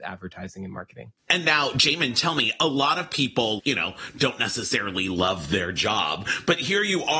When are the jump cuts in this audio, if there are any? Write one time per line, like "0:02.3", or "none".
0:01.3
0:03.6